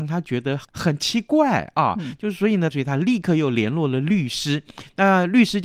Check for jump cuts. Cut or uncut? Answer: cut